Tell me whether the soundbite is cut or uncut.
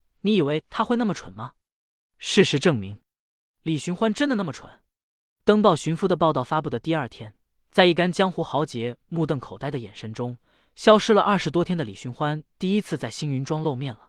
uncut